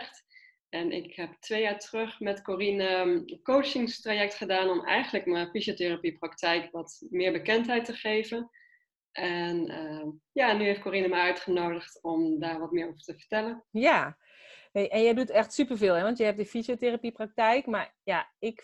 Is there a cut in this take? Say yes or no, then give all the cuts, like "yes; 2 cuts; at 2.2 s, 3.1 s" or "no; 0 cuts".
yes; 1 cut; at 13.7 s